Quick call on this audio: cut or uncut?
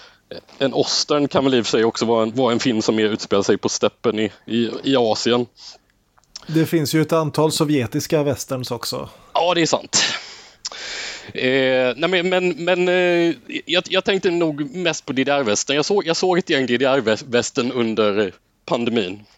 uncut